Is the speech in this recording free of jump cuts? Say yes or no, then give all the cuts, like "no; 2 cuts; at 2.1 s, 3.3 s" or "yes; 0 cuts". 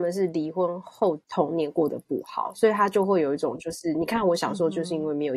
yes; 0 cuts